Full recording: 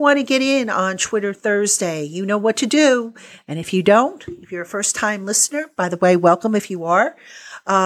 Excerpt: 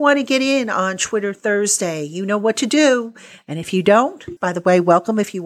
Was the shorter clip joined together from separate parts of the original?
yes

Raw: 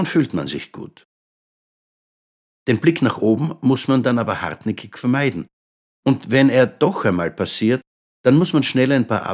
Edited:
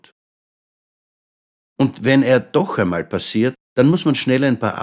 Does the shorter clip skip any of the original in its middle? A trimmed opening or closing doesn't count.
yes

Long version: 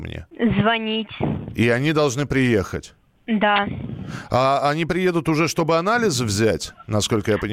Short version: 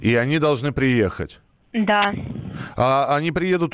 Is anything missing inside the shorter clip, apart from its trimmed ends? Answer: no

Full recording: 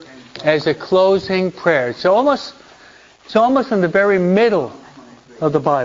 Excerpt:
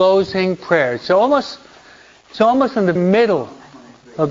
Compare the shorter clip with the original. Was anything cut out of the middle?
yes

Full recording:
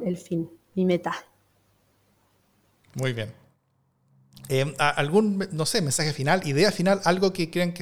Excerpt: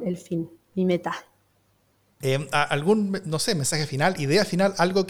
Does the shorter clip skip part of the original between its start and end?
yes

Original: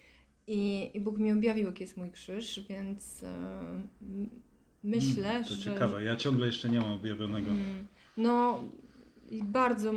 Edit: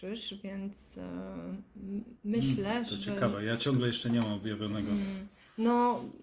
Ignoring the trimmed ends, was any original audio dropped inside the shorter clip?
yes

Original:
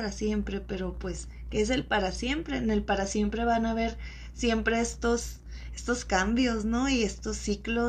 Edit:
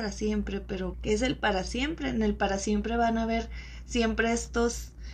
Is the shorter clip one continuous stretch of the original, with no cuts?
no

